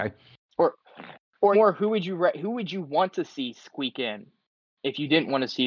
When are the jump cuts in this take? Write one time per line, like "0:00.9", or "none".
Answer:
0:01.5